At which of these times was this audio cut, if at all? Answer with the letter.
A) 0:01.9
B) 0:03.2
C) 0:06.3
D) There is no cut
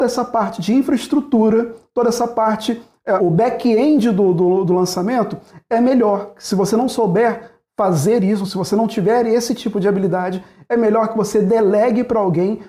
B